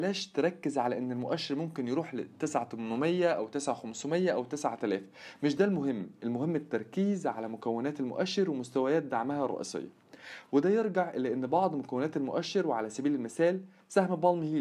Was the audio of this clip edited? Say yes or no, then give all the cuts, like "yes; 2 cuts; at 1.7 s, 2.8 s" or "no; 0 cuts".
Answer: no; 0 cuts